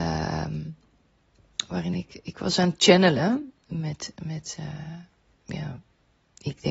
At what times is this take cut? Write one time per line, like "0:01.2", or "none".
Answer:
none

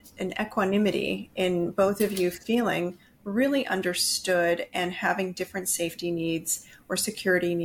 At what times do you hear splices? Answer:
none

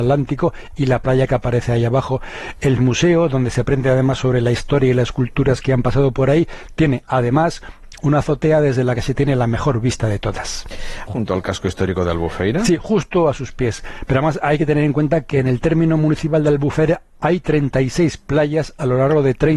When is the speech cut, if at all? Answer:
0:11.1

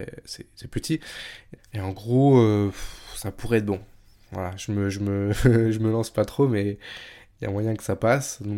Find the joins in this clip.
0:01.6

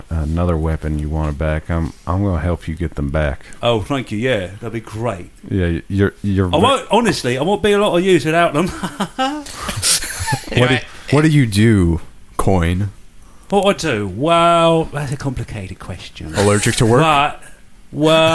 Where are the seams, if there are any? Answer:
none

